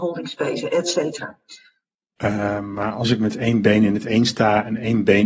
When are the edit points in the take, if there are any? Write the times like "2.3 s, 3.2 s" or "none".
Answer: 2.2 s